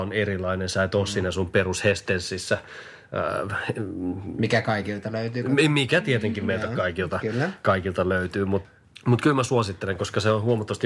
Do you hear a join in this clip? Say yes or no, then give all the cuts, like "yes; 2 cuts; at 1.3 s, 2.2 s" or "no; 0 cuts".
no; 0 cuts